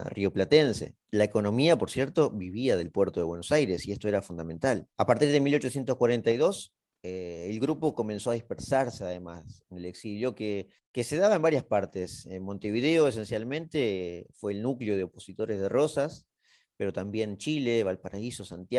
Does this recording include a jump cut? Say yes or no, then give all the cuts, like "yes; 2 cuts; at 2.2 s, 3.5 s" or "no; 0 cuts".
yes; 1 cut; at 4.9 s